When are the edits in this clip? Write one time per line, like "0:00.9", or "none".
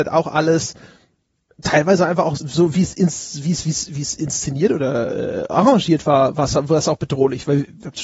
0:02.4